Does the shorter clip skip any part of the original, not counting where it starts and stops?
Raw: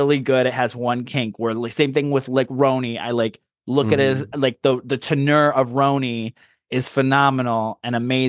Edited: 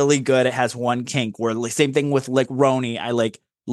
no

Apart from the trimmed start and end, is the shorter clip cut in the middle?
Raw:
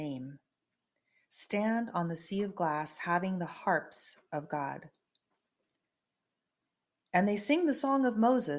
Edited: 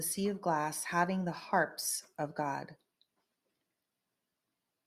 no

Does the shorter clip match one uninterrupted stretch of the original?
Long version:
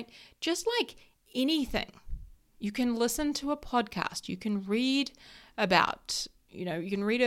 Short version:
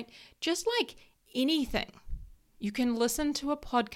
yes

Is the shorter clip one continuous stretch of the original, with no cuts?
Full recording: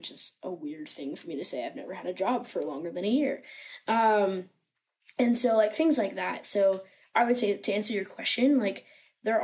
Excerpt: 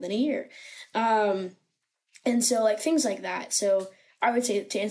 yes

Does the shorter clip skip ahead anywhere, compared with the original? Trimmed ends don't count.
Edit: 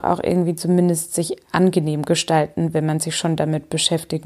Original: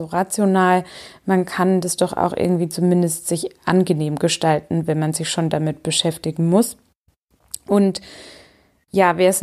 no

